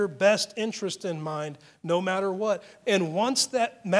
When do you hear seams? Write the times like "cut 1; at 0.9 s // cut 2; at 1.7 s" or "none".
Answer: cut 1; at 2.8 s